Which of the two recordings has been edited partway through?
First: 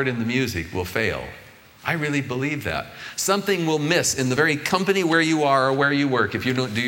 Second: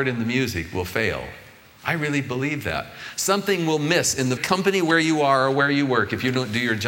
second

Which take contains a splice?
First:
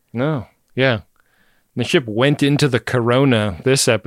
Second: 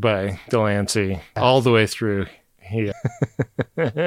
second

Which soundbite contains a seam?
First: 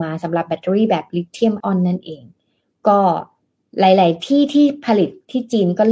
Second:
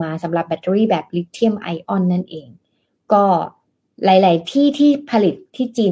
first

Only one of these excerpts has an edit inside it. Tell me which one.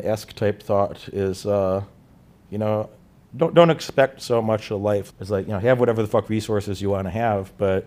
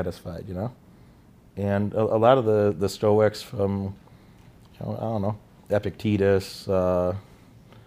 first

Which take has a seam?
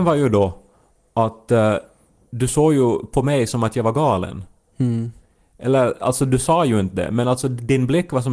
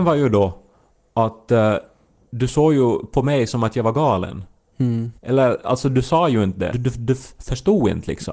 second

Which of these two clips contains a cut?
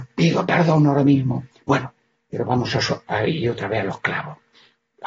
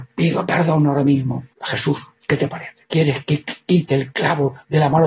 second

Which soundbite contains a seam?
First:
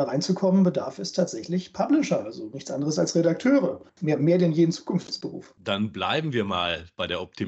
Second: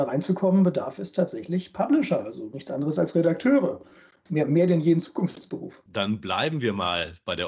first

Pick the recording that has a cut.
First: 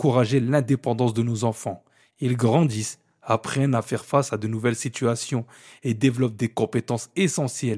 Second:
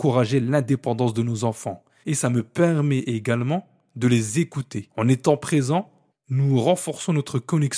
second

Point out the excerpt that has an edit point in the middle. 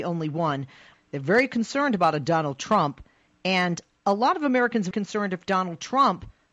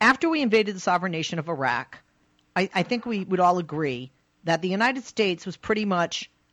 first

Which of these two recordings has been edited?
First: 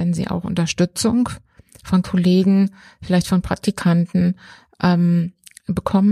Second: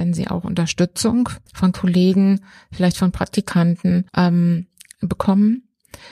second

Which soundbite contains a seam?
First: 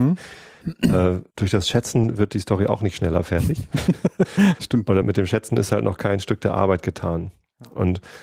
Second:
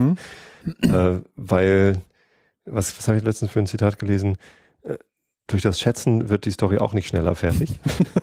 first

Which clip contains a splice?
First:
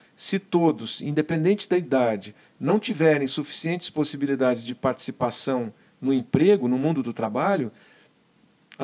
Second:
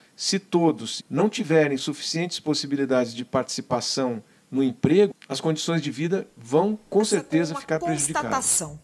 second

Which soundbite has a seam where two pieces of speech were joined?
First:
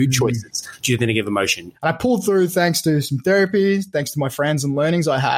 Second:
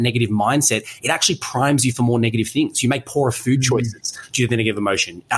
first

